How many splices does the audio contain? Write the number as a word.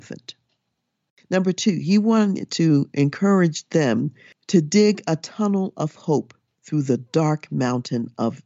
zero